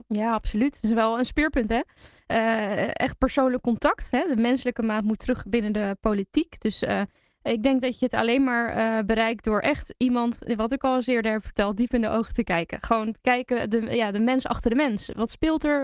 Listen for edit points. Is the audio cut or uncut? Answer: uncut